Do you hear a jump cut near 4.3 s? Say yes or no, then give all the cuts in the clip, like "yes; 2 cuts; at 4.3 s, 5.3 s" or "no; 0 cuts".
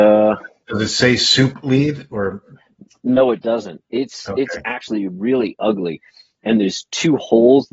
no; 0 cuts